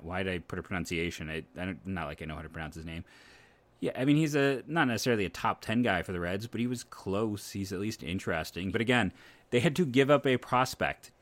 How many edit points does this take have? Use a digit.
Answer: 1